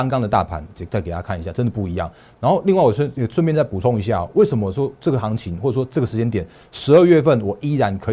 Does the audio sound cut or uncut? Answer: cut